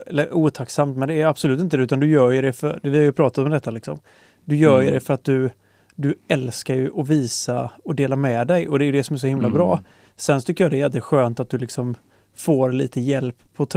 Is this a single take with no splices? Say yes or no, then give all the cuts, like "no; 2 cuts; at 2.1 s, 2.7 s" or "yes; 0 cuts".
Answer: yes; 0 cuts